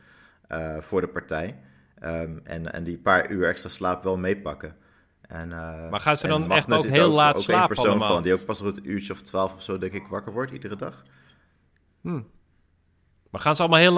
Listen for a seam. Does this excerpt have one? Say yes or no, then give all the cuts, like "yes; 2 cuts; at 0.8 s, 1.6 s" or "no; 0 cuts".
no; 0 cuts